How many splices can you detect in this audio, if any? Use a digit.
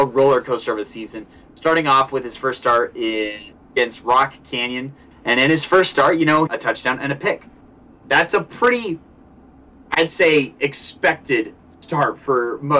2